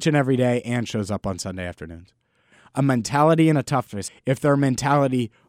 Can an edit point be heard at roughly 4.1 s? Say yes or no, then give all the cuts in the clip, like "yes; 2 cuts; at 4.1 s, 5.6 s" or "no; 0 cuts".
yes; 1 cut; at 4.1 s